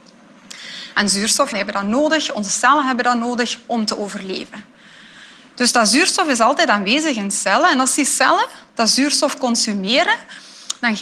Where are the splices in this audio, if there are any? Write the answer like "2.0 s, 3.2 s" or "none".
1.5 s

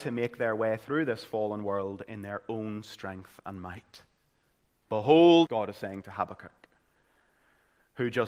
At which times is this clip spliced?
5.5 s

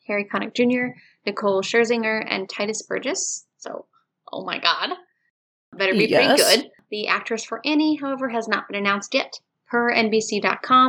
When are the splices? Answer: none

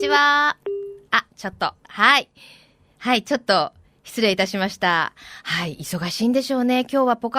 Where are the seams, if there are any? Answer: none

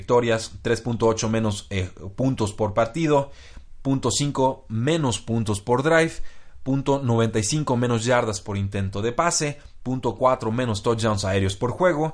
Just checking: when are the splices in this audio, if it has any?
none

